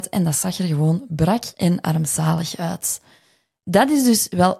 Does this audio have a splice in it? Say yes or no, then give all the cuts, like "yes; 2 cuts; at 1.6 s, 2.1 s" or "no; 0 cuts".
no; 0 cuts